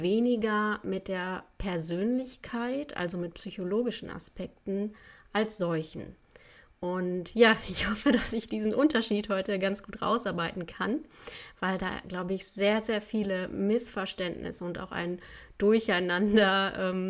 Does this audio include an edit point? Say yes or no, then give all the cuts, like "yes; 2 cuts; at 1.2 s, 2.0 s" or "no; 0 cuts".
no; 0 cuts